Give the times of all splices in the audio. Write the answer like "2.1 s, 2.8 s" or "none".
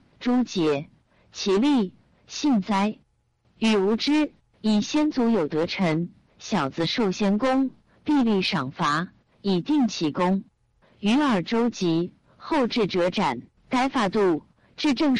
10.8 s, 13.6 s

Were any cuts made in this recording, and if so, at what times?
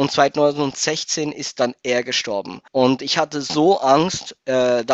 2.7 s

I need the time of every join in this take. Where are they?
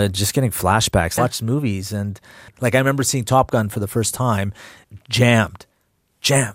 1.2 s

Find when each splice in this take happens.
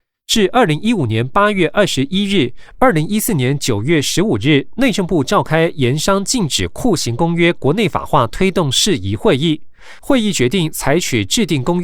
2.8 s

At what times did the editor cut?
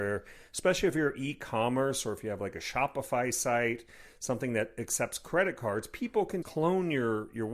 6.4 s

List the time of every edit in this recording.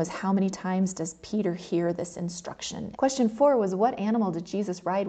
3.0 s

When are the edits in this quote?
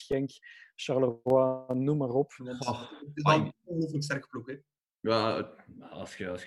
2.4 s

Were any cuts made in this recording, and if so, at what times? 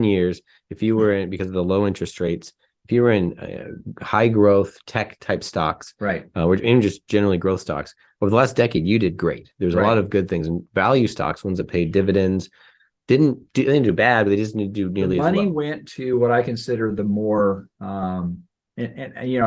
none

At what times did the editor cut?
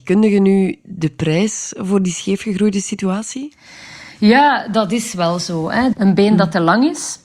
5.9 s

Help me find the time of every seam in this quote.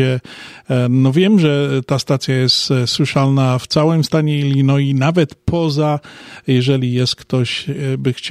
none

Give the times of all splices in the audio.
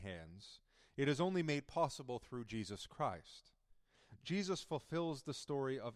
none

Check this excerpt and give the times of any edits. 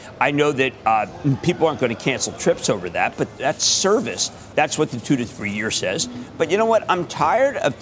4.5 s

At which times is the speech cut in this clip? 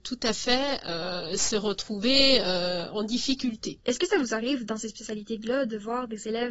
3.8 s

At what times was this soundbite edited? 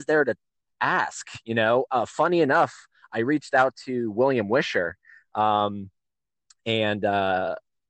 none

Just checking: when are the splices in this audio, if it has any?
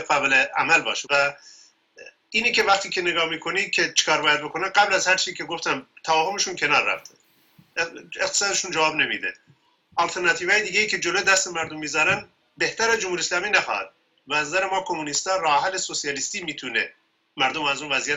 1.0 s

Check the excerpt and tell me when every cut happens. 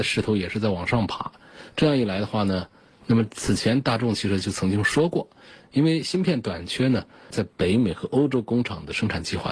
3.0 s, 7.3 s

